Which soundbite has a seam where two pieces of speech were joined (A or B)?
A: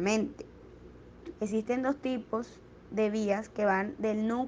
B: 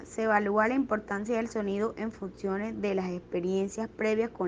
A